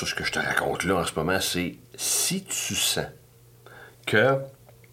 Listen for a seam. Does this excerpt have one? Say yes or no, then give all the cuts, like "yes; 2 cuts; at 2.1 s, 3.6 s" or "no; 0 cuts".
yes; 1 cut; at 1.9 s